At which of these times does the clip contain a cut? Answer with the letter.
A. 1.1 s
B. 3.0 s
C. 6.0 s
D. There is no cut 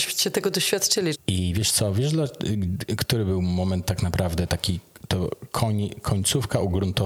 A